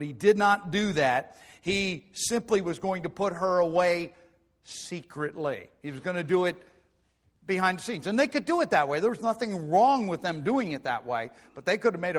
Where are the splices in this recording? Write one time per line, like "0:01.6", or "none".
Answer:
none